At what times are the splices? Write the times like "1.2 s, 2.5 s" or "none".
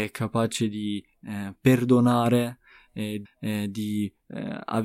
3.3 s